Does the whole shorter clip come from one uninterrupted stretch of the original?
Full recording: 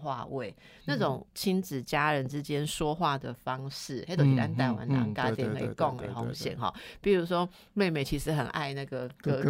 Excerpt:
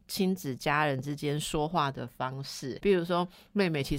no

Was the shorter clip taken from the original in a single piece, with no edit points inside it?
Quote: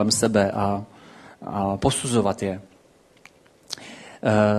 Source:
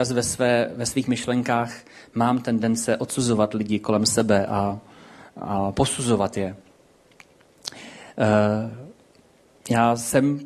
yes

